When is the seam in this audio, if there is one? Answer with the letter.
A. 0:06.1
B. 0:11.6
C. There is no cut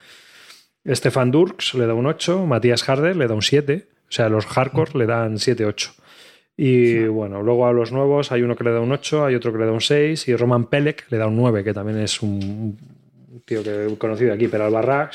C